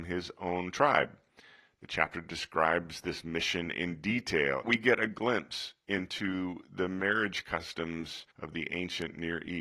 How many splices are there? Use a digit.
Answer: 2